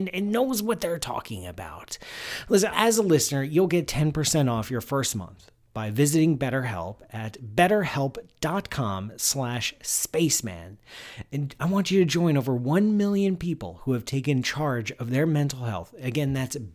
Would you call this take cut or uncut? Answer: cut